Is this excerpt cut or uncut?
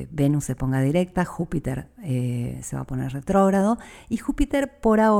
uncut